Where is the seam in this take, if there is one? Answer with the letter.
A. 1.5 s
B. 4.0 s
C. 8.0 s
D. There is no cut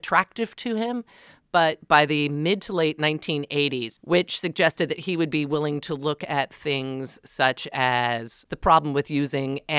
B